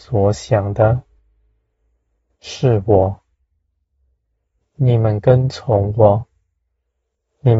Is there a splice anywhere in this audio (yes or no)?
yes